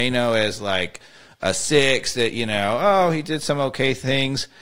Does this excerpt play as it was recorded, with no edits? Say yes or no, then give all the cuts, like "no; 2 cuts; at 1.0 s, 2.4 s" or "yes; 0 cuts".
yes; 0 cuts